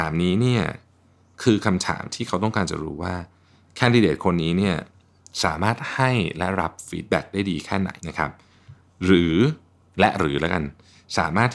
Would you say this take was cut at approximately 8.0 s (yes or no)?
yes